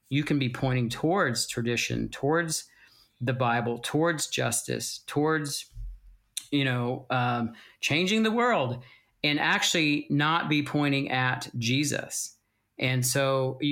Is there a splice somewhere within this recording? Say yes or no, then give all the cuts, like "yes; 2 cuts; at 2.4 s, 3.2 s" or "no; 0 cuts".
no; 0 cuts